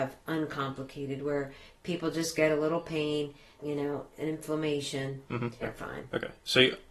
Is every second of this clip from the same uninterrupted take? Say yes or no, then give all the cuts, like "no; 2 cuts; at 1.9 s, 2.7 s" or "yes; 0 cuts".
no; 2 cuts; at 3.6 s, 5.6 s